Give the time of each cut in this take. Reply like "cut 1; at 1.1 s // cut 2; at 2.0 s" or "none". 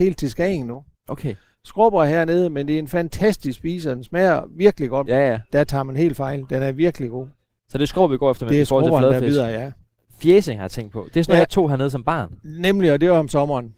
cut 1; at 5.1 s